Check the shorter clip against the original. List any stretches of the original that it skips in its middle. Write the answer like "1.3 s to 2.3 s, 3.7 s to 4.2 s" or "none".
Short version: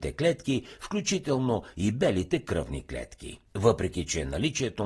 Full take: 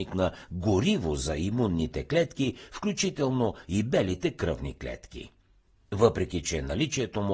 5.4 s to 5.8 s